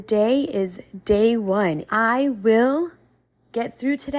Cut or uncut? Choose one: cut